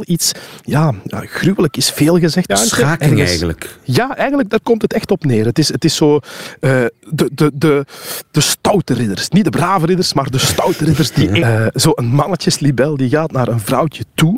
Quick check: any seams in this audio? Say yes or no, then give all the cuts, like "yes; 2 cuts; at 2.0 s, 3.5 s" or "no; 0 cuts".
yes; 2 cuts; at 2.5 s, 11.4 s